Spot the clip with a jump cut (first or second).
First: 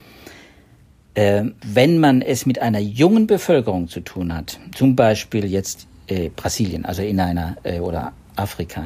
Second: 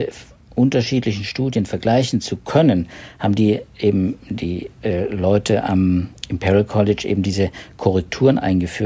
first